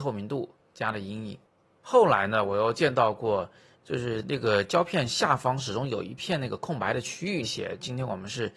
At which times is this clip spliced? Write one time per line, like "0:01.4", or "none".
0:03.7
0:07.4